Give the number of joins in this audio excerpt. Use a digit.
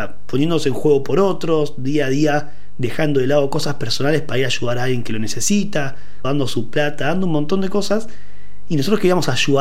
1